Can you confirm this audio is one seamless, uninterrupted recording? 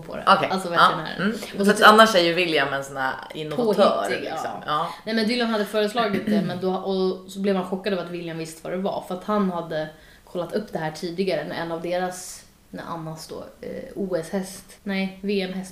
no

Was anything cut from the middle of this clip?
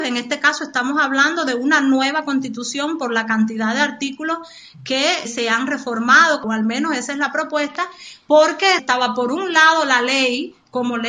yes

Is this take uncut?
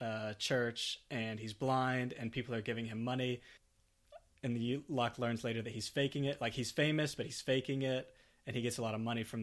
yes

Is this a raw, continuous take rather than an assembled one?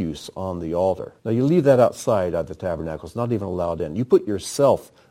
no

